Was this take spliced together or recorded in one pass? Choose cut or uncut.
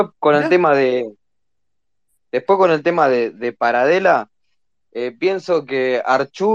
uncut